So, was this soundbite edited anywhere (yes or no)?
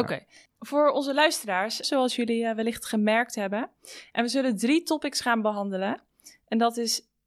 yes